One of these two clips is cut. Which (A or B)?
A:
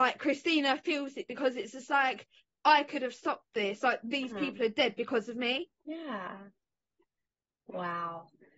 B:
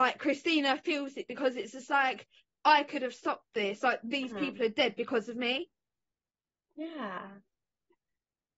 A